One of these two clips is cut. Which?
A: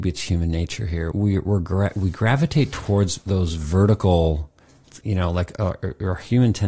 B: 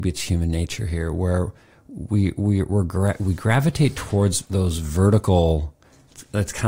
A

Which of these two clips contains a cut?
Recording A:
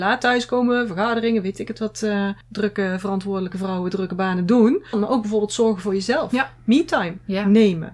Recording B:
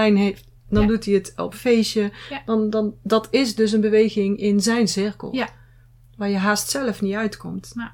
A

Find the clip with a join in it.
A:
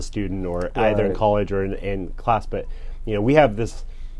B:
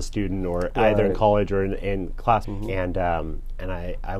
B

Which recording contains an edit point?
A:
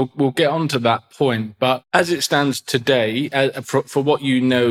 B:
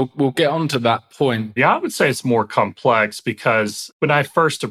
B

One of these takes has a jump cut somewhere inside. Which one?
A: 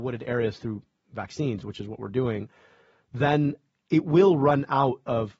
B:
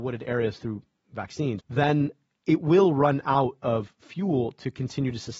B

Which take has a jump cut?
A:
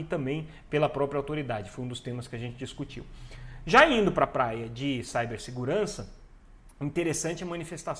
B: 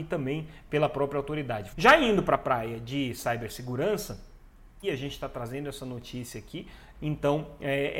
B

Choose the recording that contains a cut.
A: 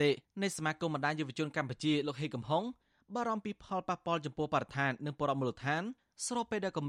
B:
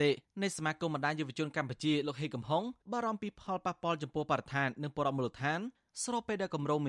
B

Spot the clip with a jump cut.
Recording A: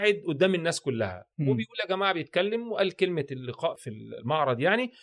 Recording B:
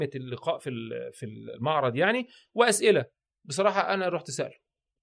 A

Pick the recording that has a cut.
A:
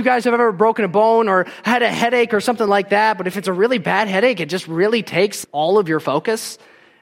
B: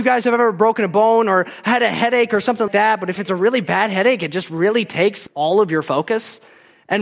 B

